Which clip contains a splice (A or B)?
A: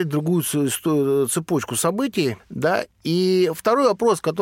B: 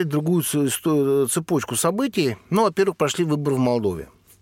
A